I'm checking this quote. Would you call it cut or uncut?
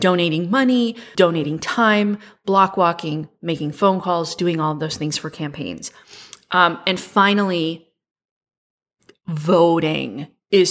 cut